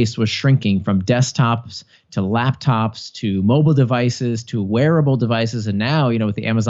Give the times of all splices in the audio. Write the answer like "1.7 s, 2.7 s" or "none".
none